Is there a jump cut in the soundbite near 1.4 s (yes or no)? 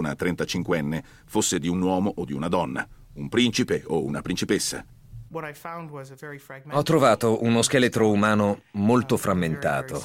no